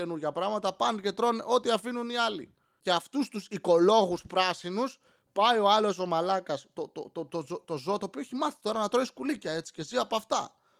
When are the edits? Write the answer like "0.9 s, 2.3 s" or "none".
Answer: none